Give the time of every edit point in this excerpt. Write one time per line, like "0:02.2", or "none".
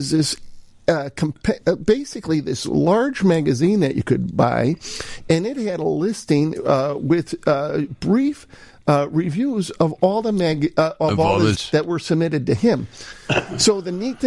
0:11.5

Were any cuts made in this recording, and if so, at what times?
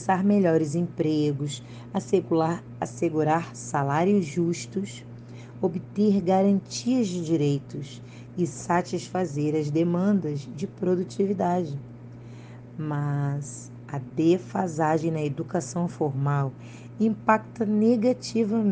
none

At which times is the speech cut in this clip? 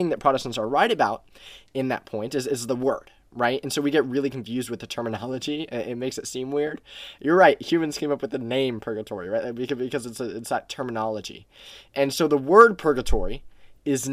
none

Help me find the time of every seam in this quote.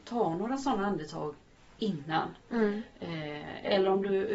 none

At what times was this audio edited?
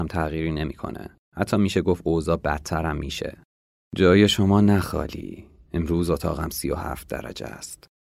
0:03.7

